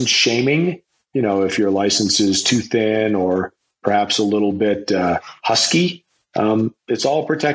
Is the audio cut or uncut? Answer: uncut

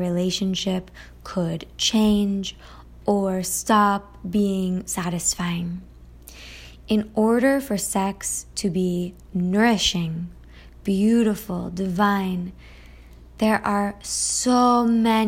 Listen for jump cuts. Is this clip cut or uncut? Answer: uncut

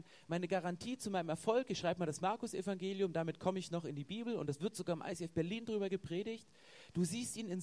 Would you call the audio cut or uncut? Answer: uncut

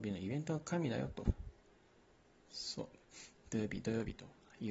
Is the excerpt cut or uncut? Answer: uncut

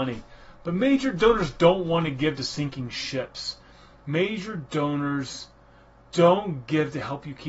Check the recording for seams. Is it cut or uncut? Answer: uncut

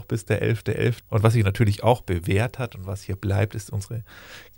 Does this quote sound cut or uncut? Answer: cut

